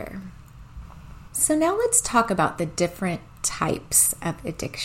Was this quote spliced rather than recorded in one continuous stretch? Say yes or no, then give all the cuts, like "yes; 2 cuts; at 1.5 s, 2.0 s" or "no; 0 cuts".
no; 0 cuts